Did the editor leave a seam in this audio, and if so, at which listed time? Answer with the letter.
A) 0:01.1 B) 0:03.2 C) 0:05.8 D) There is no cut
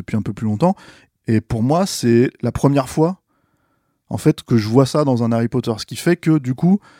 A